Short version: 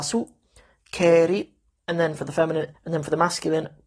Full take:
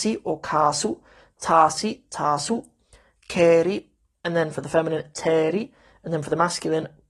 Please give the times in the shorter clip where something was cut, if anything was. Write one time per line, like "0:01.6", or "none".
0:02.7